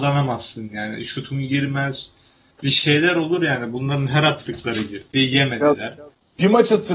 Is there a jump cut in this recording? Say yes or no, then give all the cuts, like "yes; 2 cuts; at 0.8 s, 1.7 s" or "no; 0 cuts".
yes; 1 cut; at 2.5 s